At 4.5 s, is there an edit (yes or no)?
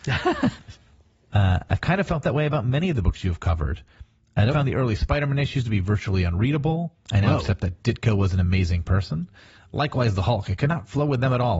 yes